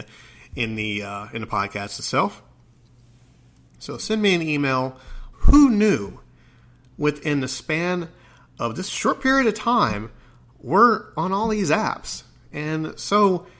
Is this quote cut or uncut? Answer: cut